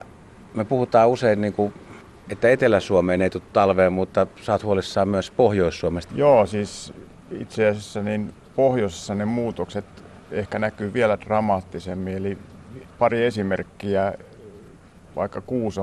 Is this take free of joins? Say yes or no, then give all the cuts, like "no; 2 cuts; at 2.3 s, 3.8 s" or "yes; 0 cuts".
no; 2 cuts; at 6.1 s, 12.9 s